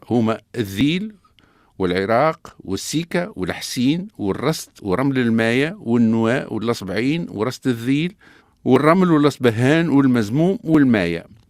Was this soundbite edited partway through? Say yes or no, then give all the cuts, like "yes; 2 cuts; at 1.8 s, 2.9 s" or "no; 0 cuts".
no; 0 cuts